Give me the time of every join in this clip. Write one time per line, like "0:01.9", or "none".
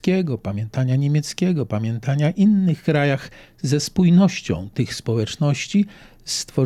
0:03.4